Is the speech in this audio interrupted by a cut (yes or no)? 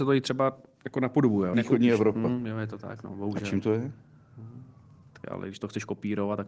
yes